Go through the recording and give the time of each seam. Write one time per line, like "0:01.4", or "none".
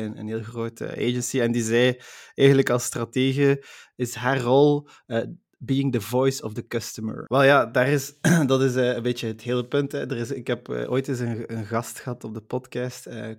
0:07.3